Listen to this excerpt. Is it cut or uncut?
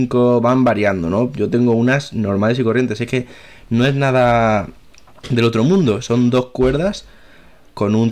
uncut